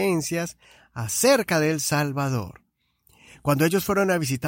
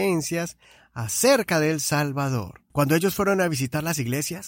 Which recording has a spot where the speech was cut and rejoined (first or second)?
second